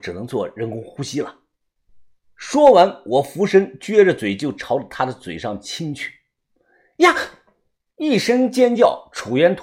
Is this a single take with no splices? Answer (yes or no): yes